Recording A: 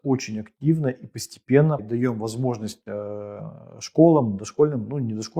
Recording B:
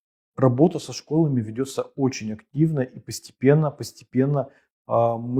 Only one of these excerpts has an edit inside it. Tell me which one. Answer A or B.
A